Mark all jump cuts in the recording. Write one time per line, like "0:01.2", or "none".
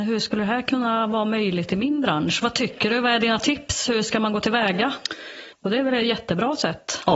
0:05.5